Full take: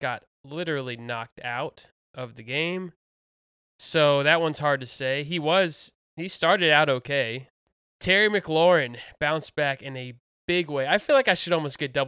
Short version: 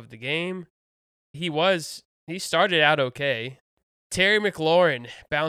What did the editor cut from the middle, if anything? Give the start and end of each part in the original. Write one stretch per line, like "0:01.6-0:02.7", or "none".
0:03.6-0:05.2